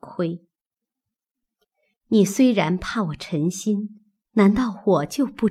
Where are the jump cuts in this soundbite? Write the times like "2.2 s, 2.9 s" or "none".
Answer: 4.2 s

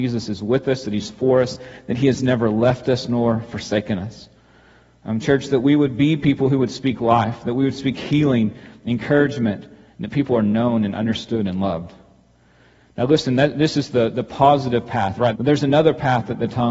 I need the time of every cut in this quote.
15.3 s

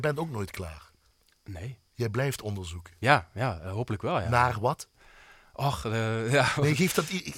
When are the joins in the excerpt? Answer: none

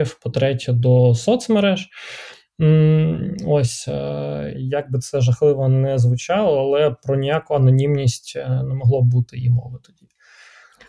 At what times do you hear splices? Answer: 4.5 s

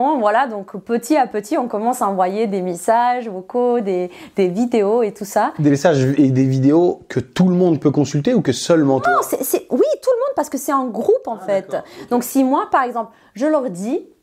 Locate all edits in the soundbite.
none

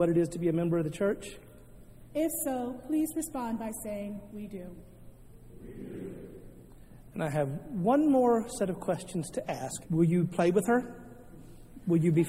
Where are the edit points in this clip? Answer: 2.1 s, 9.8 s

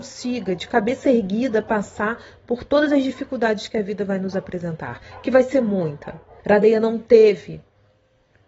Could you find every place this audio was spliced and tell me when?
6.4 s

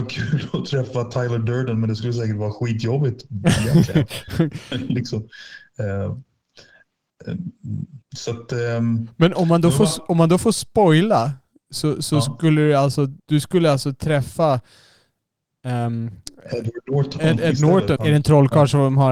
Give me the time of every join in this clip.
13.2 s, 18.0 s

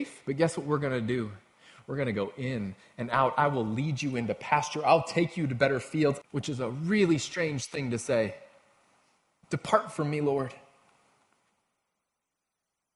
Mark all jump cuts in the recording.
6.2 s

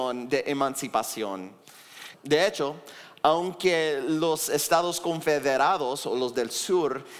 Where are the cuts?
2.1 s

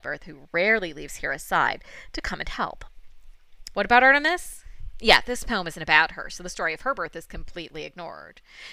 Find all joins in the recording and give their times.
3.7 s

